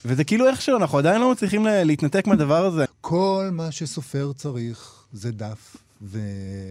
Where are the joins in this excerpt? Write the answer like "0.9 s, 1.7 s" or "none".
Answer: 2.8 s